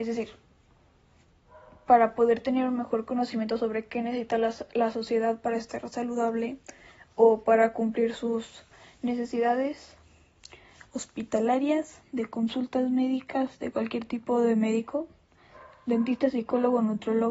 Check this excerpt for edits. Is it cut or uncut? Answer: uncut